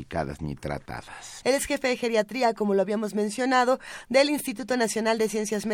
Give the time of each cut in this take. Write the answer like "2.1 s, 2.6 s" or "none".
1.4 s